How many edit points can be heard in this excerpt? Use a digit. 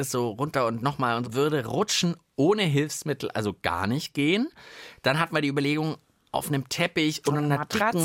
1